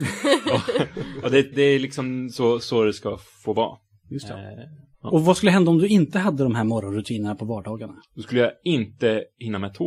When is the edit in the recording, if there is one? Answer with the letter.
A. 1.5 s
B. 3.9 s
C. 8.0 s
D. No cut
A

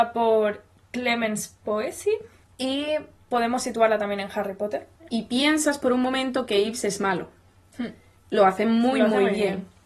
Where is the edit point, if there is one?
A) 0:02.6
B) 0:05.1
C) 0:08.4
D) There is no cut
B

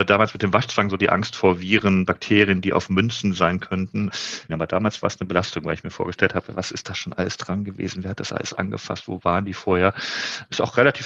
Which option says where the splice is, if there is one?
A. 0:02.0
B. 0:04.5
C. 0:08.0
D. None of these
B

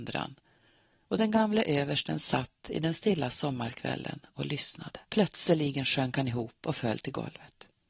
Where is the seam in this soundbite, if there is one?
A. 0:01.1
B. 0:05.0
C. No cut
B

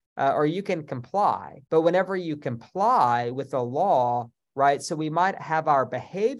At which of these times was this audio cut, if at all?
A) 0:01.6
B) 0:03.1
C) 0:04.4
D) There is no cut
C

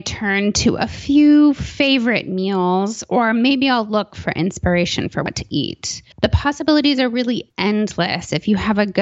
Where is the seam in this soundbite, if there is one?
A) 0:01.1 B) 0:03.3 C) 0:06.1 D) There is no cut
C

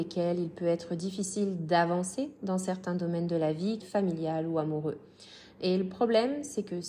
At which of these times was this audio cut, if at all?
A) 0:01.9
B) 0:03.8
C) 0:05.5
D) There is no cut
B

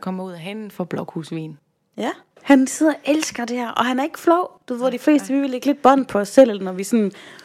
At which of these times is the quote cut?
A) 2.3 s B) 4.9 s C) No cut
A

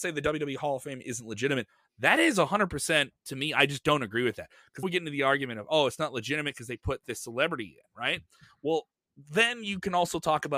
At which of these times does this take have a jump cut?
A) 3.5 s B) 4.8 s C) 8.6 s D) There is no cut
B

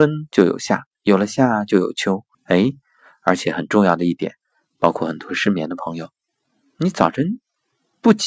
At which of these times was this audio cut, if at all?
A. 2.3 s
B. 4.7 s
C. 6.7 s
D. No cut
A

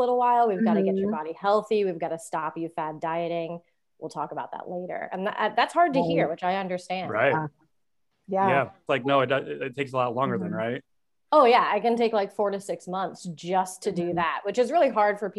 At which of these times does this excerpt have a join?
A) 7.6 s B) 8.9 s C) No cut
B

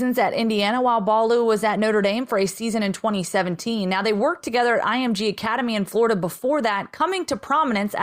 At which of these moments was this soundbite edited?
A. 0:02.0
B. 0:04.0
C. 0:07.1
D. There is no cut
D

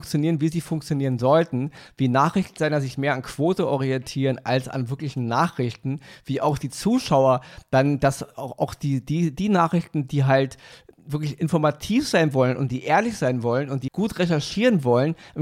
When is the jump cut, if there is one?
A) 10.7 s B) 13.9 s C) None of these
B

